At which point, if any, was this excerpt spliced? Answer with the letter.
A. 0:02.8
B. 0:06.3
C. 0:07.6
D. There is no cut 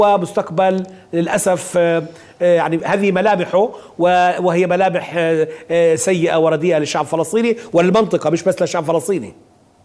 A